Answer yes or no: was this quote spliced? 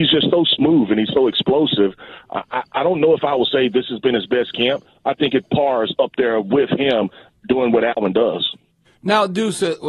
no